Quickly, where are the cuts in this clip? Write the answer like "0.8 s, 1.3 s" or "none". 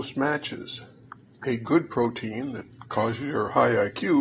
none